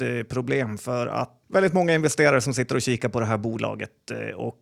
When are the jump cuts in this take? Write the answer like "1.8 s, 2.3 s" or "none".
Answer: 1.4 s